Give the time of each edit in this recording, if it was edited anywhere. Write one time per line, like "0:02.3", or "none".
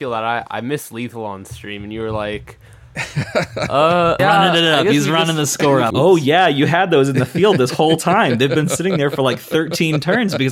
0:04.2
0:05.9